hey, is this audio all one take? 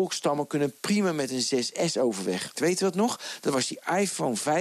no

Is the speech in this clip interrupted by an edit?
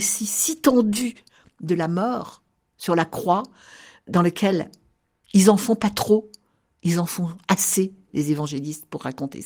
no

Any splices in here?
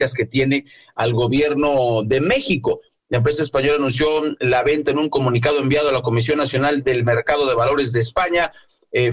yes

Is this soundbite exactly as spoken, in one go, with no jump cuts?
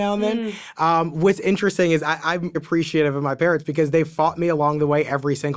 no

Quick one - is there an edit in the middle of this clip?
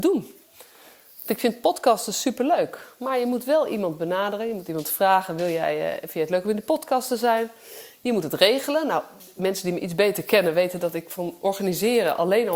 no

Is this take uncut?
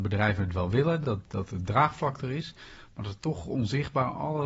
yes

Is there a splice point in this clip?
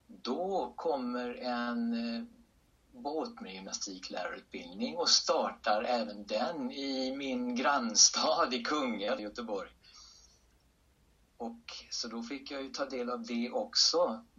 yes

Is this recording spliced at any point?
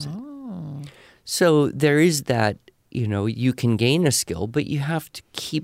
no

